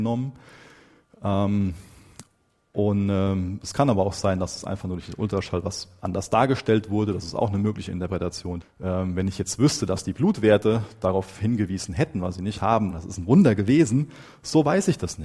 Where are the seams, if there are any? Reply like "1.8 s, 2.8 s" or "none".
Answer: 8.6 s, 12.9 s